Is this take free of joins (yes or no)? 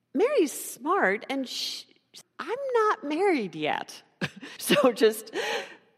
no